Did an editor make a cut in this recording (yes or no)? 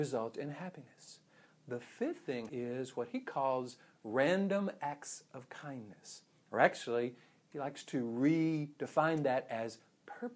yes